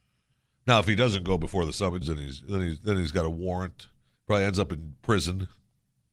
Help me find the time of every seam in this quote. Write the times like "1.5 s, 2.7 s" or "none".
2.0 s